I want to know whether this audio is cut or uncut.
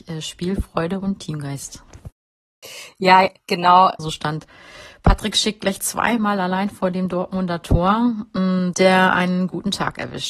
cut